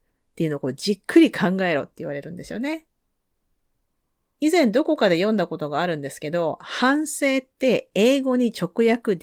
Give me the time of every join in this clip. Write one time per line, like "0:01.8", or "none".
none